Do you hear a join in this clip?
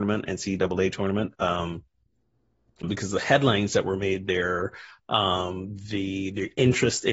yes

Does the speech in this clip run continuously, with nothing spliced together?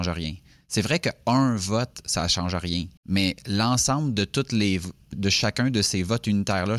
no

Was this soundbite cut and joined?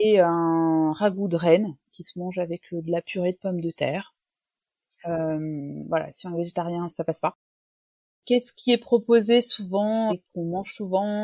yes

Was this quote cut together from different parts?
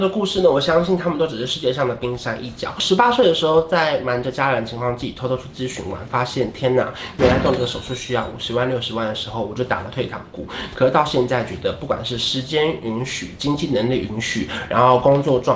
no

